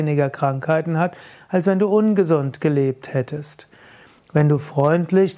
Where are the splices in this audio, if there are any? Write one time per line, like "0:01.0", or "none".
none